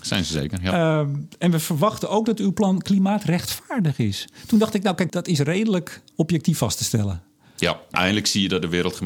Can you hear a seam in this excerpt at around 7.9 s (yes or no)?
yes